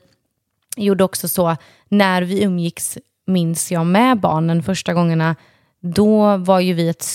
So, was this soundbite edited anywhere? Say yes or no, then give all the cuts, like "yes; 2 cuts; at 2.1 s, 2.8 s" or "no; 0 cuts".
no; 0 cuts